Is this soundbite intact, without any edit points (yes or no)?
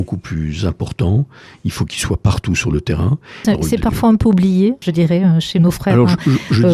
no